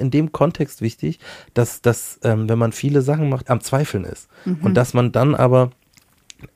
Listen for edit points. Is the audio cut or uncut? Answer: cut